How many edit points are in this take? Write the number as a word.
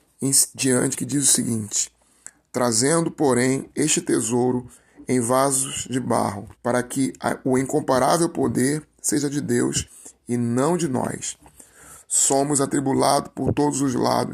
one